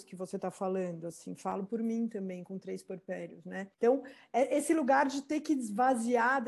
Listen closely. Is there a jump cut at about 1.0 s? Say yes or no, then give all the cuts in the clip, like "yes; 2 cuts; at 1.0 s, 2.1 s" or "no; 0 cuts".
no; 1 cut; at 3.7 s